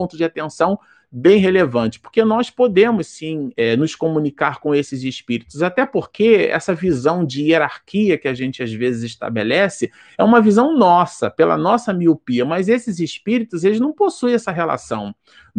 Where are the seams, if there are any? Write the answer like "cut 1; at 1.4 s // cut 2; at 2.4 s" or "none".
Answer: cut 1; at 3.5 s